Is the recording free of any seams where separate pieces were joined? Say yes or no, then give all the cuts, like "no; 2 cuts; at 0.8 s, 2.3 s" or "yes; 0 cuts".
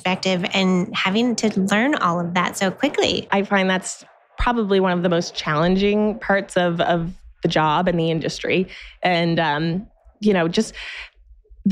yes; 0 cuts